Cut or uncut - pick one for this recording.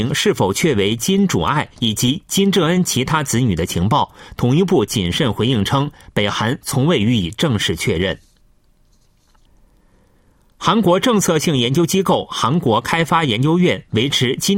uncut